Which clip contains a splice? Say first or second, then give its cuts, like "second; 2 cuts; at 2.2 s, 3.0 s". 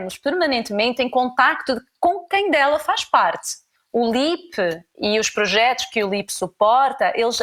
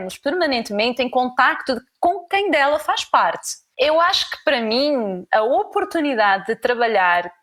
second; 2 cuts; at 3.7 s, 5.3 s